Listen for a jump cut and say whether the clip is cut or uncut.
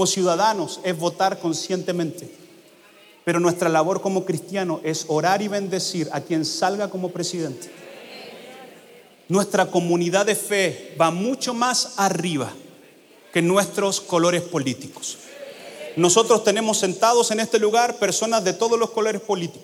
uncut